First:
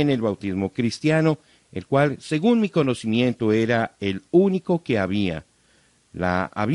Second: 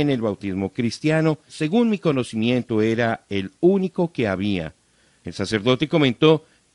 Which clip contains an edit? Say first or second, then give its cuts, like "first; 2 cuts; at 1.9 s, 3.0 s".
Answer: second; 2 cuts; at 1.5 s, 5.2 s